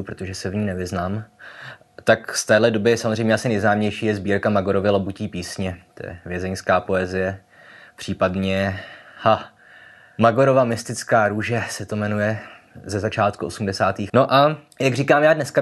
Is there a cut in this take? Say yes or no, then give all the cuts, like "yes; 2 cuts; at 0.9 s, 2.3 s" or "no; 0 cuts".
yes; 1 cut; at 14.1 s